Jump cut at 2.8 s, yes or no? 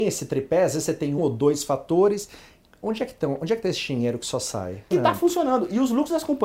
no